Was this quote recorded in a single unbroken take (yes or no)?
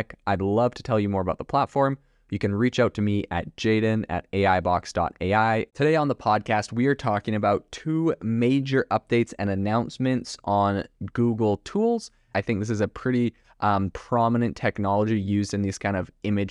no